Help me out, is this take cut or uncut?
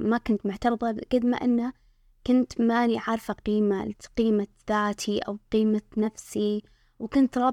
uncut